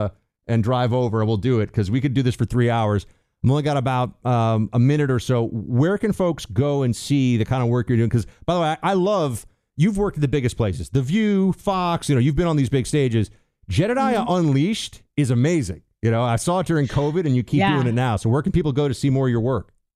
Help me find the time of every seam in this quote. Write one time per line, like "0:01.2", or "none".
none